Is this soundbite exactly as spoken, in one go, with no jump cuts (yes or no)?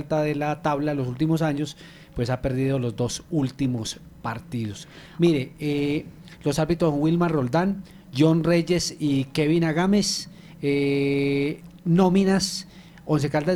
yes